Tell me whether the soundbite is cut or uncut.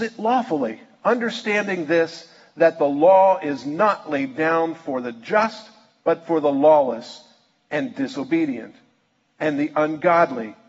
uncut